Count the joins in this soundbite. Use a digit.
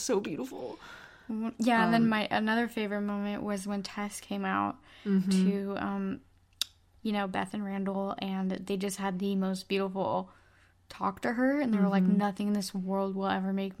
0